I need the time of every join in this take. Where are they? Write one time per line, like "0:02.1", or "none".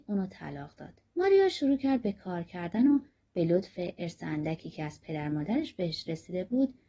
0:01.1